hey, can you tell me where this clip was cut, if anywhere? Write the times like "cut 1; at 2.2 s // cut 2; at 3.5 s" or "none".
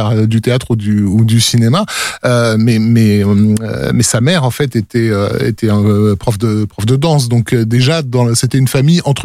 none